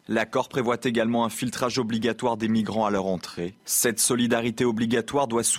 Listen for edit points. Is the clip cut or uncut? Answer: cut